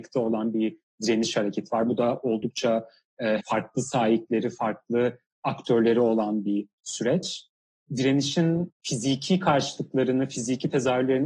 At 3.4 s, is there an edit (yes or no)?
yes